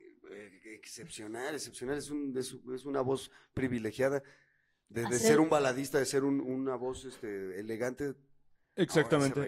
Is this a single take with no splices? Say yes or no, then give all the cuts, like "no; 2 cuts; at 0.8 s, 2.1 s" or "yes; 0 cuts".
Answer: yes; 0 cuts